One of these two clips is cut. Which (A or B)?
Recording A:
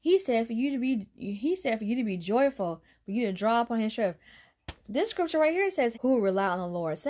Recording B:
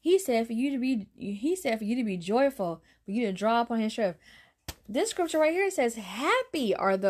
A